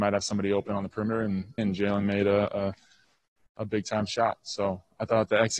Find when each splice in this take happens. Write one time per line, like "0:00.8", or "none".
0:01.6

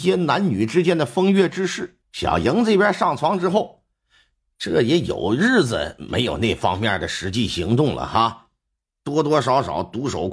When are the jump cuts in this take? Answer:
0:02.0

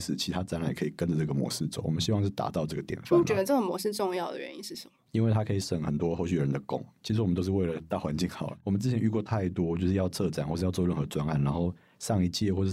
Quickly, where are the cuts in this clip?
none

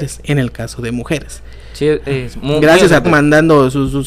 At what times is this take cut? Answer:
0:03.0

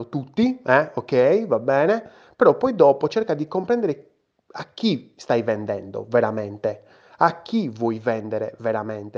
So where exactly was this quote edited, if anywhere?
none

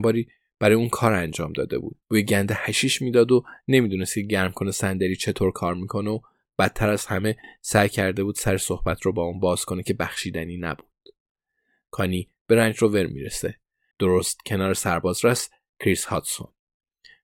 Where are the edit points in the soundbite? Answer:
0:02.0
0:11.9
0:13.9

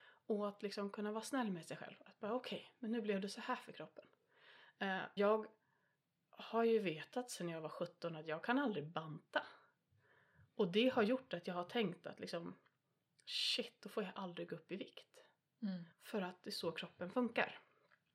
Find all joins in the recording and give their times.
0:05.2
0:15.9

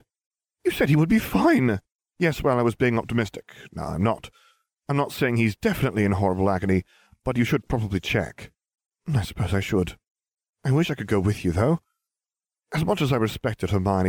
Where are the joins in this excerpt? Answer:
0:08.9

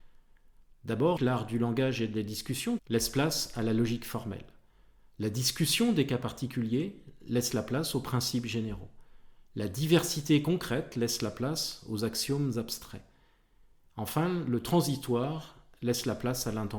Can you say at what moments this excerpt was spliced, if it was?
0:01.2
0:02.8

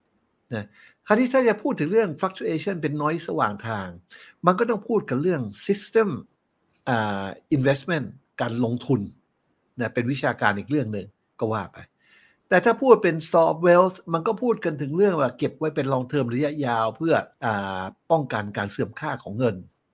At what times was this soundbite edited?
0:17.3

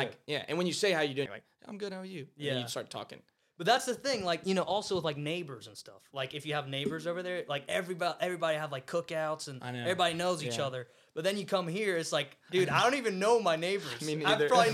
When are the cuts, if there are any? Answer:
0:01.3

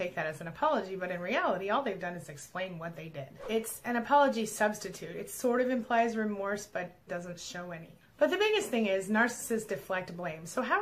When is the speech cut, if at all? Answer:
0:07.1

